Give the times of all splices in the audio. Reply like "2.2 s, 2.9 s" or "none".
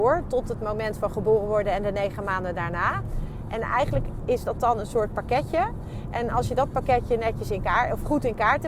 none